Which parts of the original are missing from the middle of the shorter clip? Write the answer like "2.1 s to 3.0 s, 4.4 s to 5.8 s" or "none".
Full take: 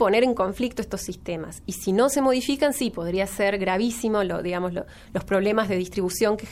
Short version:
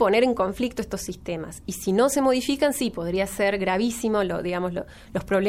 none